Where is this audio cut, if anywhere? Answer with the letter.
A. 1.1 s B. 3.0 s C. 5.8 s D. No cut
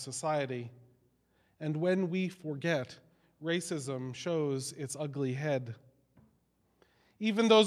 D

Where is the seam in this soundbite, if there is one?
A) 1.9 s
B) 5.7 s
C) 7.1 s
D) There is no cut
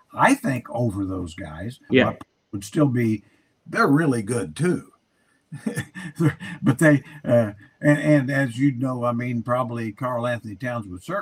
A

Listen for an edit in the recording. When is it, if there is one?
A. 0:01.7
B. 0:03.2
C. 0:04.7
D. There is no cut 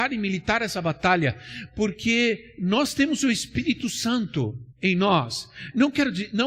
C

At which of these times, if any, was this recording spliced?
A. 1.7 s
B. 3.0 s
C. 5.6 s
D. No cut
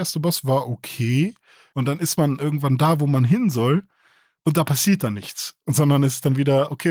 A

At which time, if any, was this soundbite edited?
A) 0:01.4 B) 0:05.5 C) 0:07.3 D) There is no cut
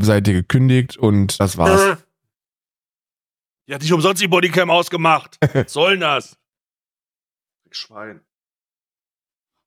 A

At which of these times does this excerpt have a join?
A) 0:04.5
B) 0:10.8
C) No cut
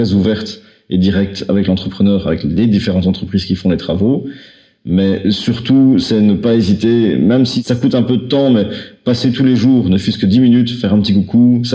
C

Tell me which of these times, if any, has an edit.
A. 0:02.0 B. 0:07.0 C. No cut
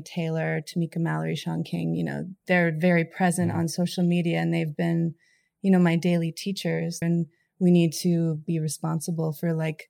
B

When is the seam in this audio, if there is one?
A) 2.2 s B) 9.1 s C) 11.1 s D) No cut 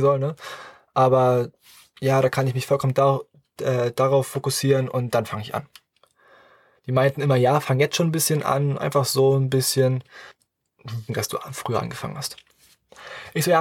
C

